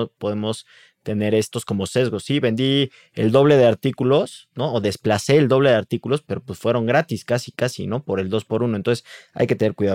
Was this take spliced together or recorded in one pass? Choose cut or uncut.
uncut